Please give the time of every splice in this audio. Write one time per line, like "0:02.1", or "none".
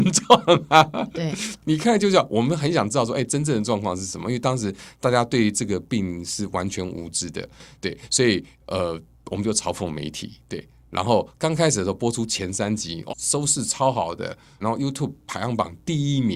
0:13.1
0:14.6